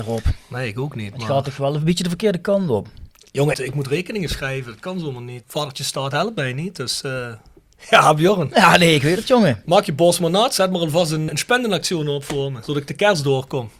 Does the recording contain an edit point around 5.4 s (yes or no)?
yes